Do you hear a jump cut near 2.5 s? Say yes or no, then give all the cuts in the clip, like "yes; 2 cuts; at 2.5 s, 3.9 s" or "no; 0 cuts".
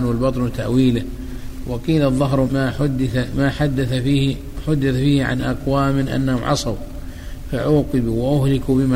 yes; 1 cut; at 2.5 s